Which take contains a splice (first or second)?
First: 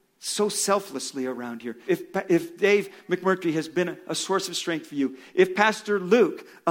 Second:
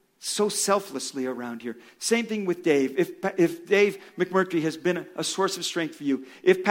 first